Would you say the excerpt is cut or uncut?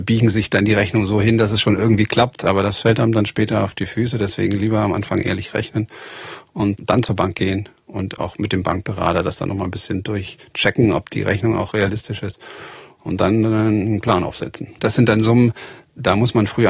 cut